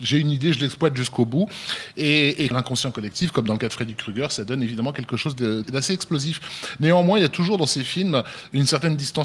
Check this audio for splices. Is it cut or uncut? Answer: cut